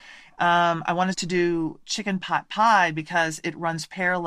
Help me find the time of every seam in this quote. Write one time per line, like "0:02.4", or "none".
none